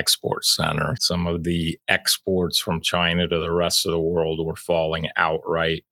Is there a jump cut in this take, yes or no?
yes